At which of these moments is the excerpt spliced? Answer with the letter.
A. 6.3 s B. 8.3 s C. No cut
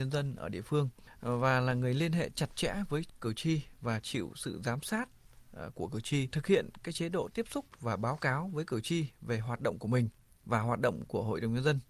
A